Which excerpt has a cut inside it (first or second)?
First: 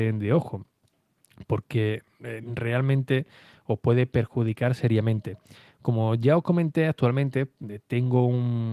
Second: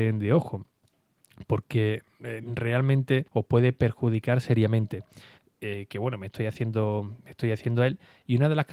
second